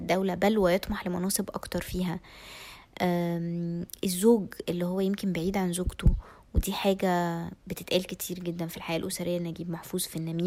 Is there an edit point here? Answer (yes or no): no